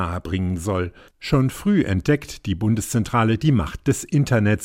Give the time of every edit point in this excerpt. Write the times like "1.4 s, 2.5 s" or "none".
1.1 s